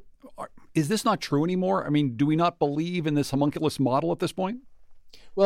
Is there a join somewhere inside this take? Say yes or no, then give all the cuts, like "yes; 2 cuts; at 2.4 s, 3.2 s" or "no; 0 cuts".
no; 0 cuts